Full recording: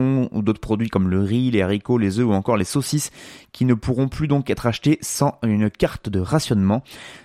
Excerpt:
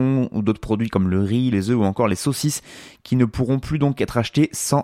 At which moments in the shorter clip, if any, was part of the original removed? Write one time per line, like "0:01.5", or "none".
0:01.5